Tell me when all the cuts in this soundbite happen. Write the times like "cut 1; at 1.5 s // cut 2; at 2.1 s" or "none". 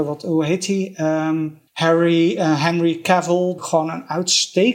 cut 1; at 1.7 s // cut 2; at 3.6 s